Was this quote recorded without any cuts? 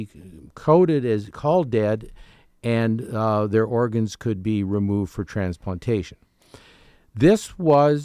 yes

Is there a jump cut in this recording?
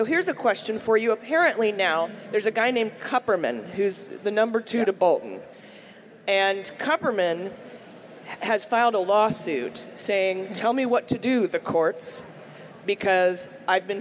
no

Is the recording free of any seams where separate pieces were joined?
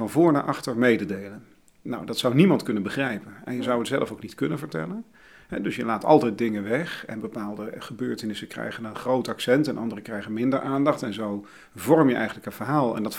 yes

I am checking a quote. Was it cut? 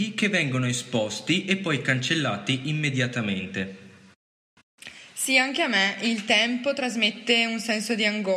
no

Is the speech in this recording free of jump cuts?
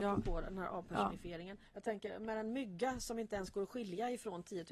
no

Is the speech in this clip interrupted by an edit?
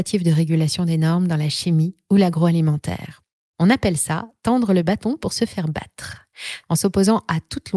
yes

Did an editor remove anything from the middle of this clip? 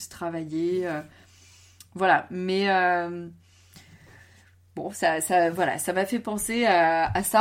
no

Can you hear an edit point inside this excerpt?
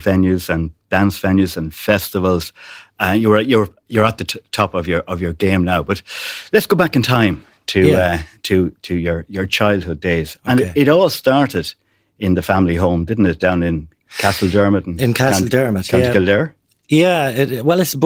no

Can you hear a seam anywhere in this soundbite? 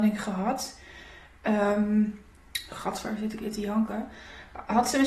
no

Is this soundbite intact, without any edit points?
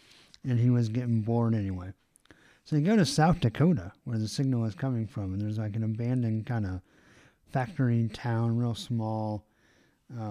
yes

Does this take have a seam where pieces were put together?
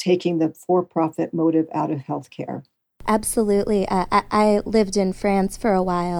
no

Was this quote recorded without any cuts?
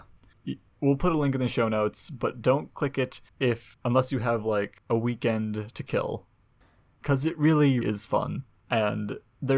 no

